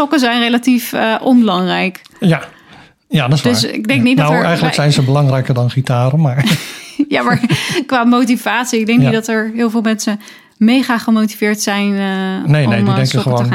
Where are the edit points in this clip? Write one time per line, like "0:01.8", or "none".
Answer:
none